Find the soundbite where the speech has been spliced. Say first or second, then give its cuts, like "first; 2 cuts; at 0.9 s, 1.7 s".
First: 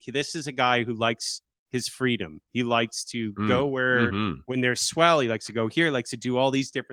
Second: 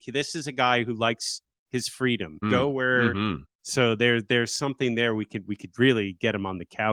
second; 2 cuts; at 2.4 s, 3.4 s